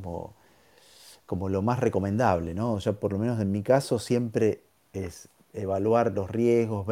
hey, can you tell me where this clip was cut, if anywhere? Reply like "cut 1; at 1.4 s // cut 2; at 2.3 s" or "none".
none